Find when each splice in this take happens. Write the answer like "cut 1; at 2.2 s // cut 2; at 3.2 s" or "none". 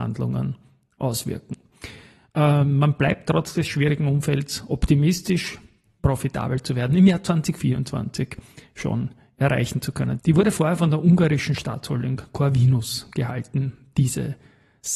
cut 1; at 6.0 s // cut 2; at 10.2 s